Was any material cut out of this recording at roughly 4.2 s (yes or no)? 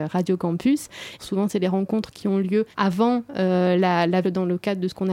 yes